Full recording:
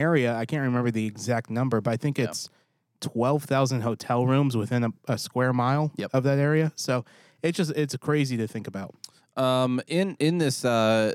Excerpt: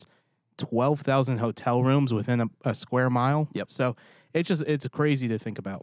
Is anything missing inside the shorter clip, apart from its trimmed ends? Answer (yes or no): yes